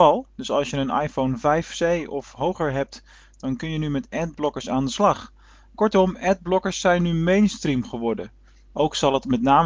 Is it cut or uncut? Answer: cut